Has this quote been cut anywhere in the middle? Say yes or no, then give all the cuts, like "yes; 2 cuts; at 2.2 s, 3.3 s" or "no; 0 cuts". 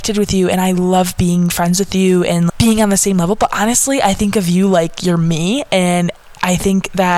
yes; 1 cut; at 2.5 s